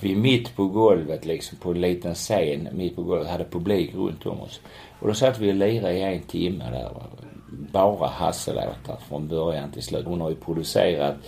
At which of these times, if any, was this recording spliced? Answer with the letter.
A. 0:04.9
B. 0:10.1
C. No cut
B